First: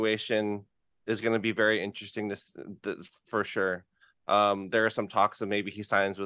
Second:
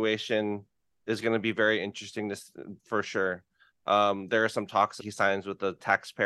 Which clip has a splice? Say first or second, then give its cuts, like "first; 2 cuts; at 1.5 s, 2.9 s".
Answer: second; 2 cuts; at 2.8 s, 5.0 s